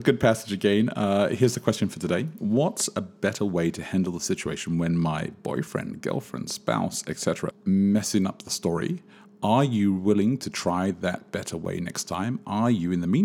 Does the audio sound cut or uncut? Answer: cut